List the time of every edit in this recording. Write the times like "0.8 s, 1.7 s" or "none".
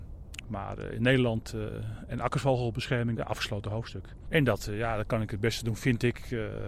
3.2 s, 4.3 s